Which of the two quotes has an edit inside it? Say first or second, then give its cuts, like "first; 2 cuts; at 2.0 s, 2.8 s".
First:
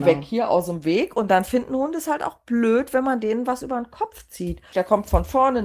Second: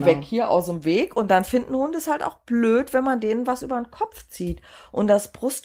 first; 1 cut; at 4.7 s